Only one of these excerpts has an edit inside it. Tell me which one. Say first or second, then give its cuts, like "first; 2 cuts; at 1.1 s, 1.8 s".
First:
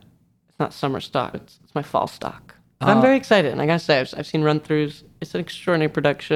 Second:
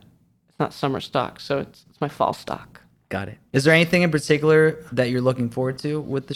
first; 2 cuts; at 1.3 s, 2.7 s